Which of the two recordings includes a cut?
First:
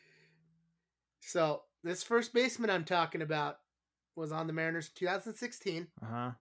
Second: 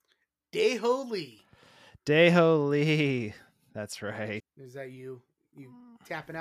second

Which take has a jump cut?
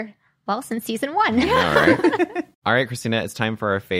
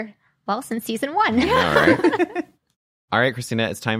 first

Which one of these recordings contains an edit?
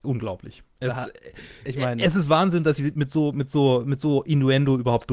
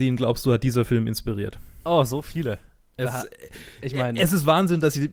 second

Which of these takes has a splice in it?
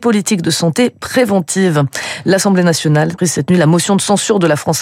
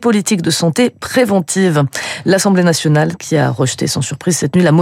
first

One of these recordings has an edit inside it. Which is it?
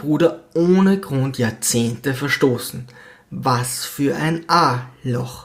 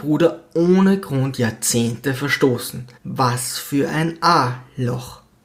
second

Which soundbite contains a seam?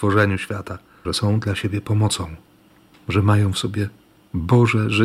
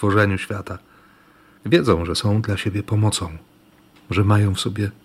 first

